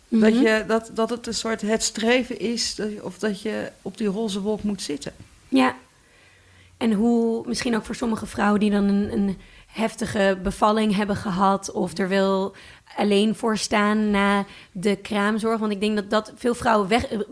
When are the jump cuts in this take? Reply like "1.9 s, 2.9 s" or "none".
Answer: 3.8 s